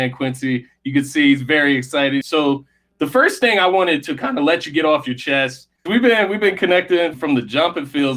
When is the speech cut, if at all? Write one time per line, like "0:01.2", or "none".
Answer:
0:02.2
0:05.9
0:07.1